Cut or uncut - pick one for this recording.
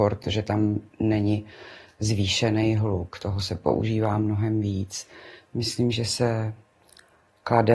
uncut